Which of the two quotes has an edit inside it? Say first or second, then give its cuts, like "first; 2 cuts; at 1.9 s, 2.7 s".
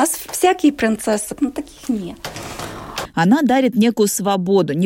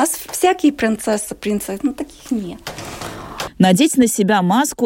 first; 2 cuts; at 1.4 s, 3.1 s